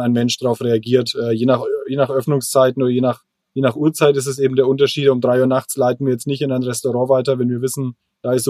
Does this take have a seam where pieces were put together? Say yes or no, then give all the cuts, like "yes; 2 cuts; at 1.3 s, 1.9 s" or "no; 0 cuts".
no; 0 cuts